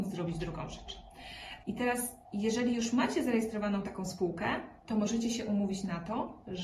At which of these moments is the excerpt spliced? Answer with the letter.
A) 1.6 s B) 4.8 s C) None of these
A